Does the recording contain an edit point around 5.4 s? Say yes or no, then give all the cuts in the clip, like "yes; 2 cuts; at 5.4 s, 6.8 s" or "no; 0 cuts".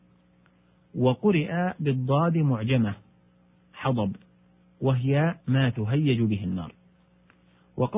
yes; 1 cut; at 5.4 s